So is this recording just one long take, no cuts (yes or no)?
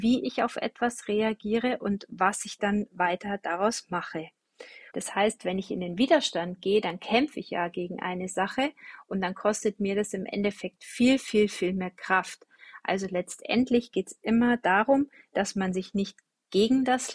no